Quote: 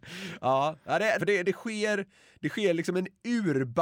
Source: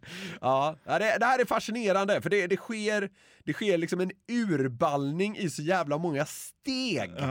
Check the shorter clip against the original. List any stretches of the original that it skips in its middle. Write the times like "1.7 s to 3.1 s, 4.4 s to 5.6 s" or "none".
1.2 s to 2.2 s